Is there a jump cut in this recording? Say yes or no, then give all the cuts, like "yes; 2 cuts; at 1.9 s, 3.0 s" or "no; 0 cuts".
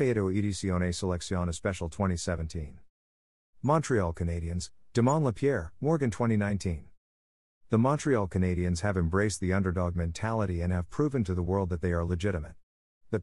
no; 0 cuts